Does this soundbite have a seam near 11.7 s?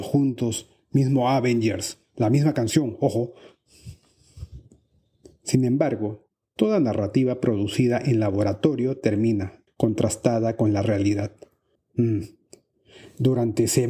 yes; 2 cuts; at 9.7 s, 11.7 s

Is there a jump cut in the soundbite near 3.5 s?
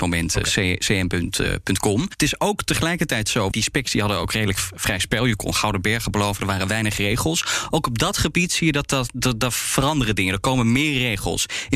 yes; 1 cut; at 3.5 s

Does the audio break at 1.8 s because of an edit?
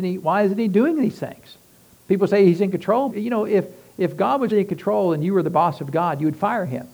no; 2 cuts; at 3.1 s, 4.5 s

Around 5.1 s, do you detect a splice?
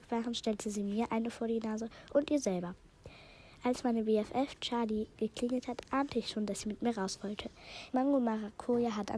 yes; 2 cuts; at 5.1 s, 7.9 s

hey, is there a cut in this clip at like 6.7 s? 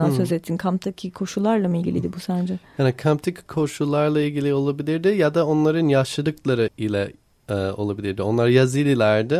yes; 1 cut; at 6.7 s

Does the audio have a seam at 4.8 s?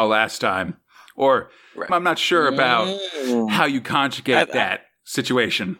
no; 1 cut; at 1.9 s

